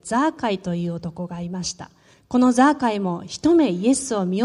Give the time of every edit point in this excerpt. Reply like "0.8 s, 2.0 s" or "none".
2.1 s